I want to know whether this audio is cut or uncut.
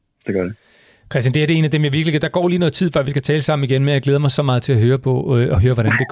uncut